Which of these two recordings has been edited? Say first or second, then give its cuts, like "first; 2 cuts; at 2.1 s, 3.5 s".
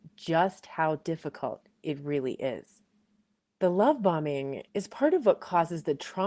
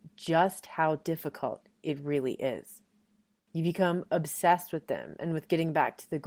second; 1 cut; at 3.5 s